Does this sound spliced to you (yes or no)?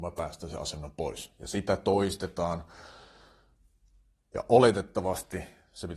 no